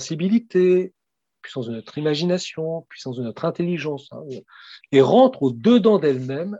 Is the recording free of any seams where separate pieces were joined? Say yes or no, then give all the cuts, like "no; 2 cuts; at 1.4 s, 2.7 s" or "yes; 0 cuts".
no; 1 cut; at 4.8 s